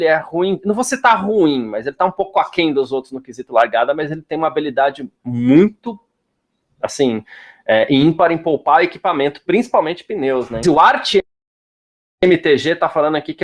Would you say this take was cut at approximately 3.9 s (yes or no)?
no